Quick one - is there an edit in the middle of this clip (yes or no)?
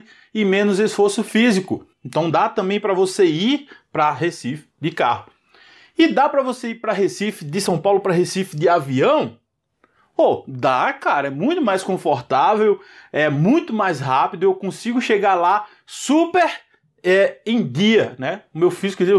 yes